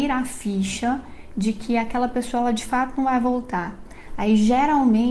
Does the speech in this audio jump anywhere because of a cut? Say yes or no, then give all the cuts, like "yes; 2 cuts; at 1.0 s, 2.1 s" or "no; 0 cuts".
no; 0 cuts